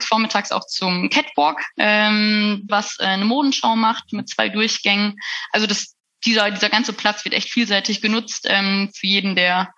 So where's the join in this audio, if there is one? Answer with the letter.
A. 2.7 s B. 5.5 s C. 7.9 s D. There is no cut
A